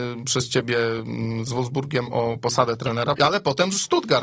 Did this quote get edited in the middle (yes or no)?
yes